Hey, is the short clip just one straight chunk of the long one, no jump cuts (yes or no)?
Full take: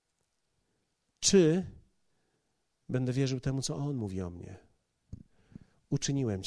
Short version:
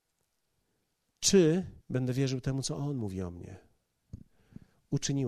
no